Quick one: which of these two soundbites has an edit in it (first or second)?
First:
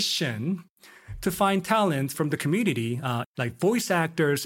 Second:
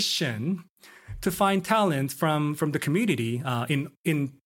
first